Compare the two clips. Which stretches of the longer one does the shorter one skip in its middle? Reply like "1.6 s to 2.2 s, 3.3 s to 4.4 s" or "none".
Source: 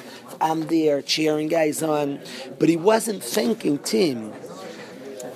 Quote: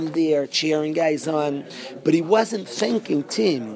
none